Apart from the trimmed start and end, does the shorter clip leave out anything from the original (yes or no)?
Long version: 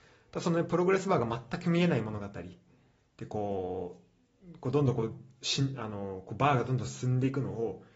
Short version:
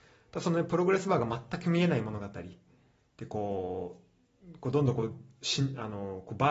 no